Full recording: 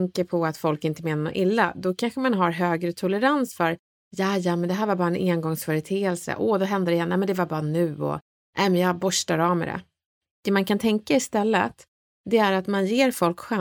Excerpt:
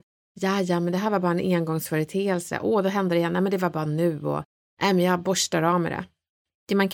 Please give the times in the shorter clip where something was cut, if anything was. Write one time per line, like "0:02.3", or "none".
none